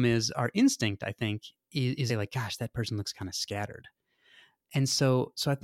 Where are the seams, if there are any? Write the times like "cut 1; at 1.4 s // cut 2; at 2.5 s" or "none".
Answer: cut 1; at 2.1 s